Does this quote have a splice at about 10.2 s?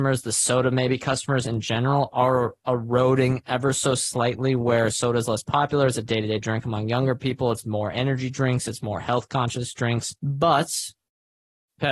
yes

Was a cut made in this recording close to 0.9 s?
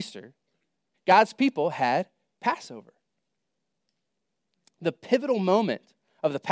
yes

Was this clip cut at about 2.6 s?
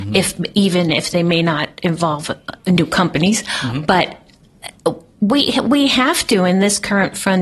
yes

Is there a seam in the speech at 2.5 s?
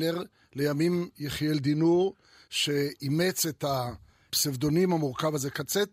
no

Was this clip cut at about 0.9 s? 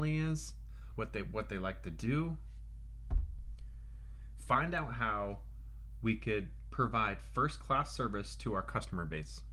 yes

